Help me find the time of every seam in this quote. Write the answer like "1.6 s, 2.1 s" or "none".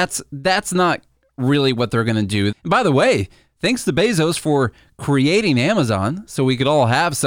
2.5 s